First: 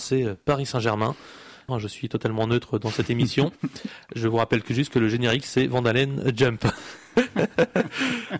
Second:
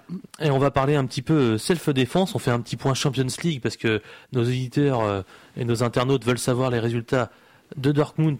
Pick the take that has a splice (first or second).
first